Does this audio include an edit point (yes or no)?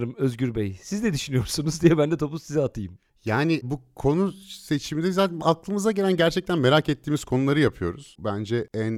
no